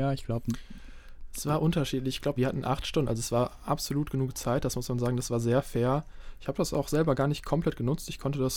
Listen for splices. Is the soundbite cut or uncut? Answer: cut